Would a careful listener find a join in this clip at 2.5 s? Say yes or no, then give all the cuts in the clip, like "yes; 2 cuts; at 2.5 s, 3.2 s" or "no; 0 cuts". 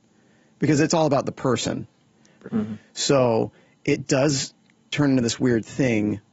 yes; 1 cut; at 2.5 s